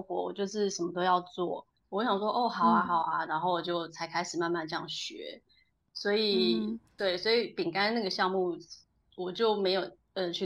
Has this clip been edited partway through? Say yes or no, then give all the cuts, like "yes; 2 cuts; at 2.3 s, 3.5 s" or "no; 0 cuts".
yes; 1 cut; at 1.8 s